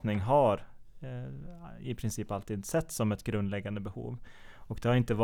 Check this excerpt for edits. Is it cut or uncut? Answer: uncut